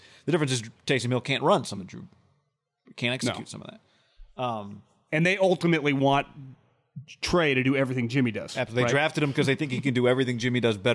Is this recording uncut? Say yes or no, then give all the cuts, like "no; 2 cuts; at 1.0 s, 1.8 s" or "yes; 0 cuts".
yes; 0 cuts